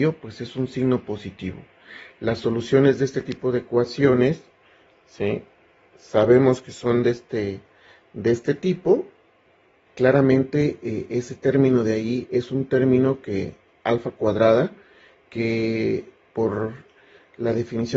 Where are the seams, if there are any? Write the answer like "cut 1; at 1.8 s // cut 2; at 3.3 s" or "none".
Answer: cut 1; at 9.9 s